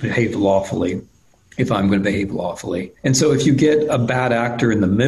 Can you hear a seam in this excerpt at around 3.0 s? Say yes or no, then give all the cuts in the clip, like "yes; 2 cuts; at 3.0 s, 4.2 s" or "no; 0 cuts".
yes; 1 cut; at 3.0 s